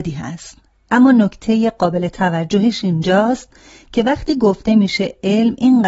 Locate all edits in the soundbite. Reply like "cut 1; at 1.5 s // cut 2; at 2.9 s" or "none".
none